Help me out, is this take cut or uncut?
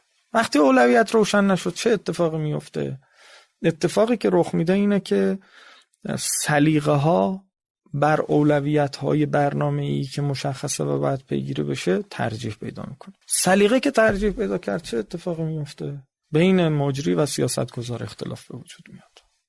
cut